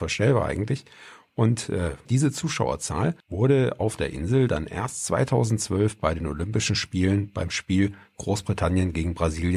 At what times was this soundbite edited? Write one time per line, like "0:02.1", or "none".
0:02.1
0:03.2